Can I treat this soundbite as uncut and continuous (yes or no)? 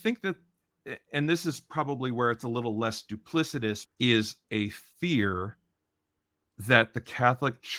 no